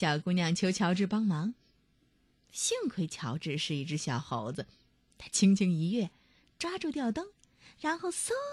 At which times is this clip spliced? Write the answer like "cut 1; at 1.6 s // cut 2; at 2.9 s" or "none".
none